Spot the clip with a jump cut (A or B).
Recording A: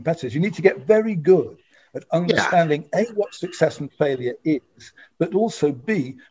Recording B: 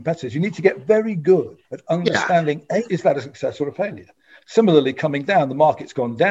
B